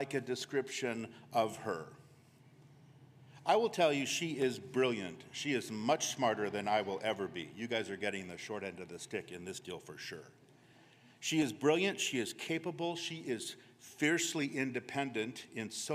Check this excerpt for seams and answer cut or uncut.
uncut